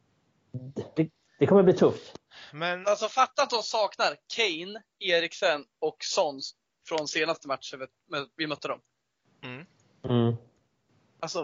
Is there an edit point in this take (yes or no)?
yes